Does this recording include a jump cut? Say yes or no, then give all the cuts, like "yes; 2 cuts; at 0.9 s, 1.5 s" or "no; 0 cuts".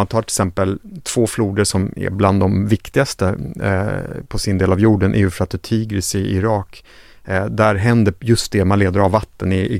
no; 0 cuts